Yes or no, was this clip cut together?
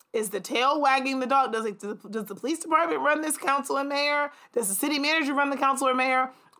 no